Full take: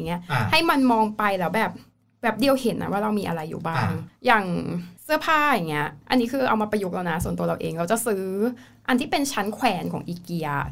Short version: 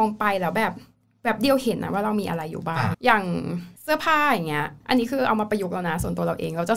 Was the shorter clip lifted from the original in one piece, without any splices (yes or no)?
no